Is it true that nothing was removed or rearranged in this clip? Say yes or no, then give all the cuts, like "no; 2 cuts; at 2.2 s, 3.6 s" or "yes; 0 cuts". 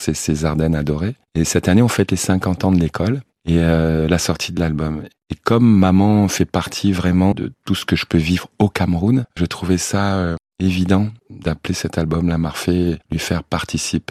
no; 1 cut; at 7.3 s